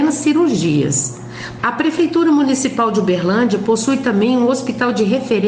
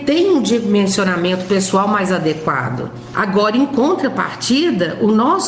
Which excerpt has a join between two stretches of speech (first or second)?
first